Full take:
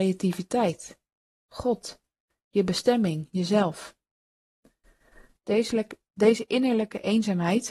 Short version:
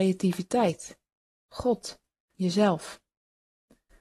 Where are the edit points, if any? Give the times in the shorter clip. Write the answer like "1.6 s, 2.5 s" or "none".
2.3 s